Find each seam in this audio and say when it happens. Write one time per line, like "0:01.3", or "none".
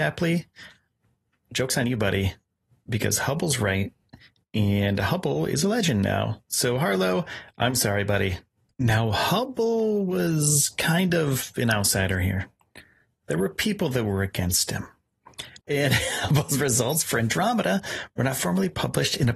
0:08.7
0:15.6